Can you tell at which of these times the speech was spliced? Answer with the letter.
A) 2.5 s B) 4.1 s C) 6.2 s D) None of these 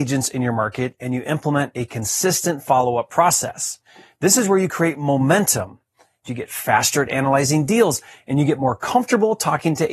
C